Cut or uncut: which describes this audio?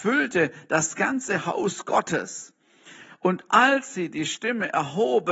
cut